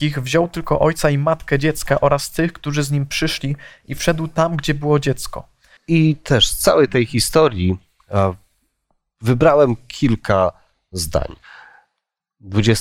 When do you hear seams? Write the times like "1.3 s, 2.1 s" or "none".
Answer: 5.8 s